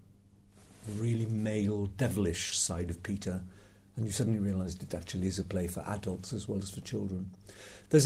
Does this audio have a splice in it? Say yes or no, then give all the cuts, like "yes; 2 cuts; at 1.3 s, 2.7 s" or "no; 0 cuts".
no; 0 cuts